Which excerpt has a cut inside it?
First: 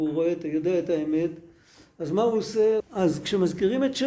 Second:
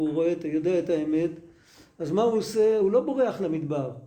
first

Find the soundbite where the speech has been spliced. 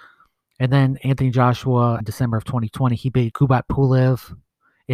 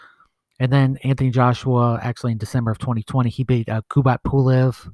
first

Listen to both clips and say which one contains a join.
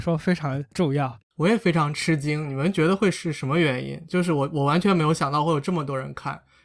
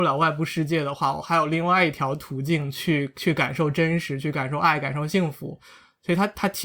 first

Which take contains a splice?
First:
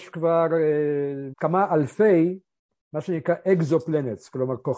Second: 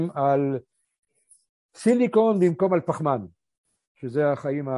first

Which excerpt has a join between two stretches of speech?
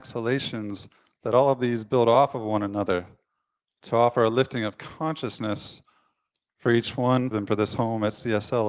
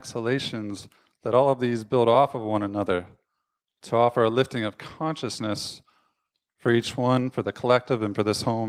first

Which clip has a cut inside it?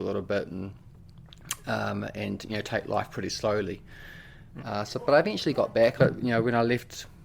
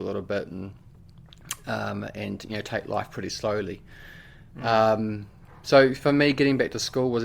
first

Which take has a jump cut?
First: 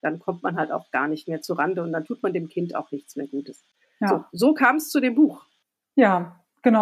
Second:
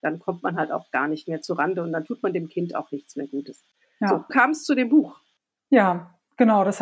second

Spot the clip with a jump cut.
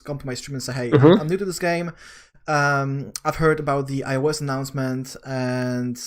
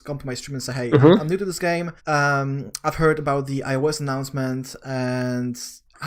second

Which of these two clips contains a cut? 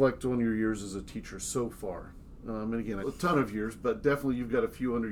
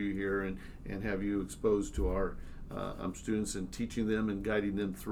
first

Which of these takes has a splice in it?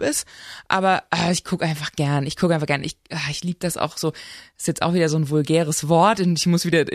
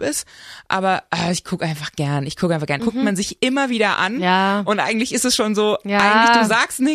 second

